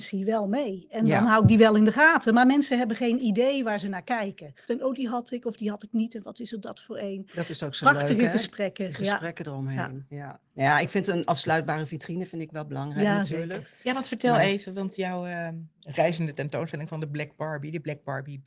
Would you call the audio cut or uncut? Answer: cut